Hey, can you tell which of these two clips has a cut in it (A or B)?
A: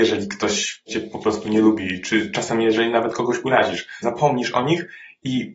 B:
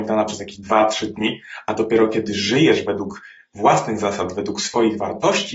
A